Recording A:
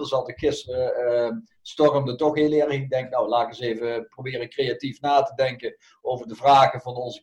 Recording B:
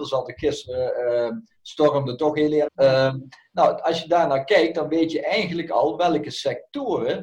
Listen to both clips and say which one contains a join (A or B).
B